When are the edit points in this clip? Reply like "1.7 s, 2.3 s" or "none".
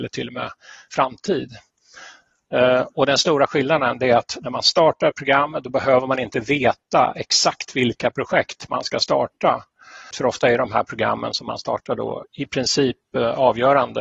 10.1 s, 12.2 s